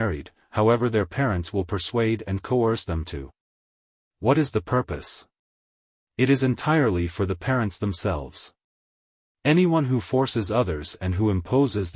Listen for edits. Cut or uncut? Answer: uncut